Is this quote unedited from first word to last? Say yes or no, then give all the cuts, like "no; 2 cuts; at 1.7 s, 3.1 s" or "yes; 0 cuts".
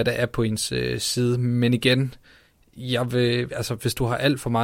yes; 0 cuts